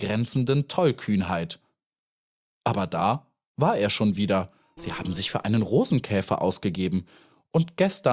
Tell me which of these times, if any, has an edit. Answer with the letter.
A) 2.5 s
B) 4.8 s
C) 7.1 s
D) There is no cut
B